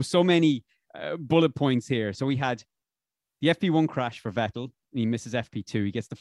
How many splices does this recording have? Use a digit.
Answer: 1